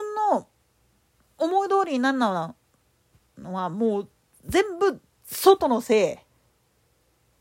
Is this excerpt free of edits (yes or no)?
yes